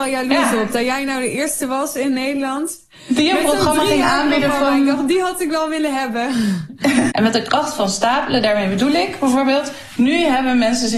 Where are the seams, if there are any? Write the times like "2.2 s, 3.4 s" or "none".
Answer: 7.1 s